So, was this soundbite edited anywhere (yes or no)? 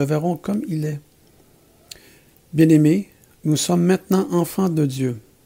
no